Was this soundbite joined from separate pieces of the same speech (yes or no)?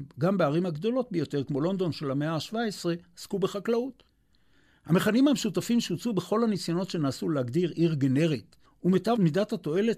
yes